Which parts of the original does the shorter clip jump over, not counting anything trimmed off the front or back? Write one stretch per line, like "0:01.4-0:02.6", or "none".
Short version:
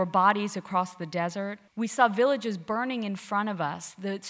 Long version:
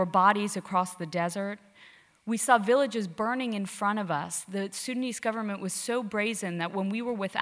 0:01.7-0:02.2